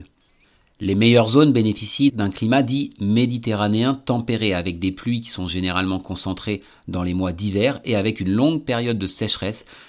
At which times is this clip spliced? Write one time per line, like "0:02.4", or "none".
0:02.1